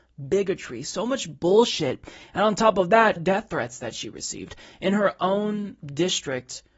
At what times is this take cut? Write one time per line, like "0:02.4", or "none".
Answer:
0:03.2